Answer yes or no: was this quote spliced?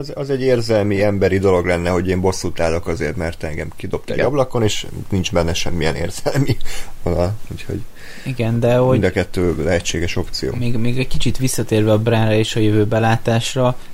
no